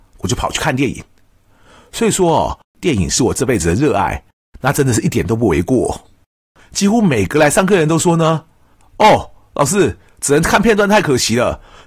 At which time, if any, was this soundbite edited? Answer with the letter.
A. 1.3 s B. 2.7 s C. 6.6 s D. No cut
C